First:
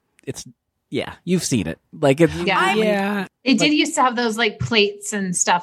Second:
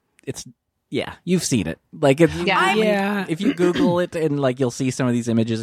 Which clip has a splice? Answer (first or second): first